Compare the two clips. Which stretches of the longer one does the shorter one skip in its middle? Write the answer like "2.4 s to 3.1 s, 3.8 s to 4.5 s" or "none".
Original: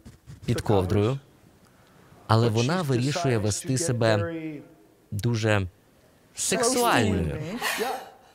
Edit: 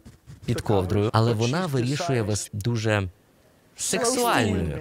1.1 s to 2.2 s, 3.6 s to 5.1 s